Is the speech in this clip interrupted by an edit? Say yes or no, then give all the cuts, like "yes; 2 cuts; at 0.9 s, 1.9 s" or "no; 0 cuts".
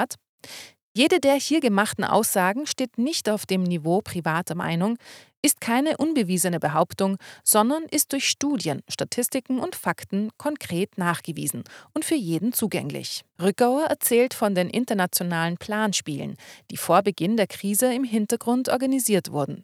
yes; 1 cut; at 13.4 s